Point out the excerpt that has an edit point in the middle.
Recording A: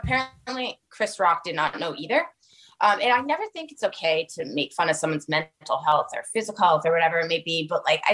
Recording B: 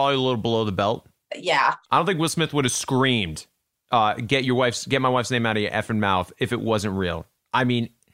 B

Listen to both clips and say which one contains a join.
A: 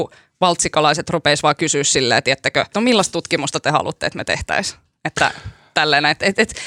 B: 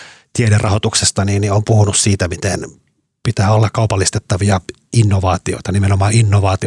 A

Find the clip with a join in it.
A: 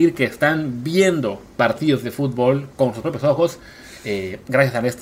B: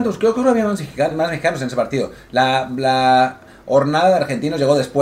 B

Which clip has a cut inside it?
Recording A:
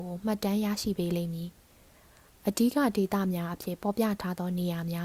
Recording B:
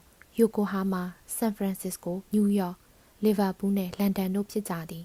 B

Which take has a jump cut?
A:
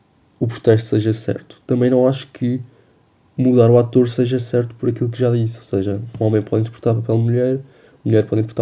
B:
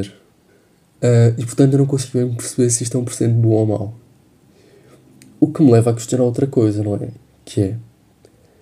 B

